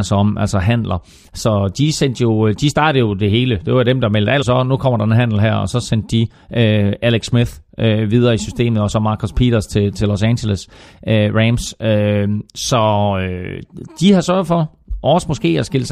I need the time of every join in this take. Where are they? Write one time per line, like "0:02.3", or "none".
0:04.4